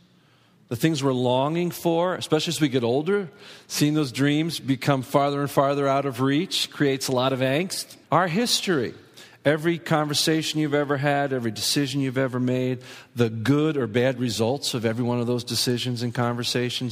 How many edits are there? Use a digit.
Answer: 1